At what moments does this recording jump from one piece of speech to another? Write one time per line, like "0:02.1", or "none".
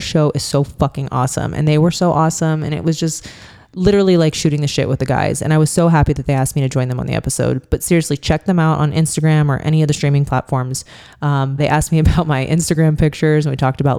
0:11.6